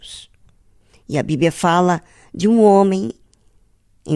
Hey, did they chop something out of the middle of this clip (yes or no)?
no